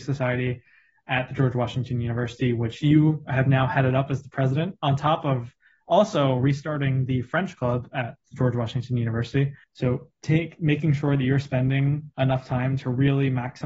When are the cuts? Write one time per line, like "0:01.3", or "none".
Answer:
0:09.6
0:12.1